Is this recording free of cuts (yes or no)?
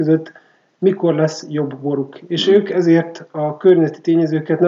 yes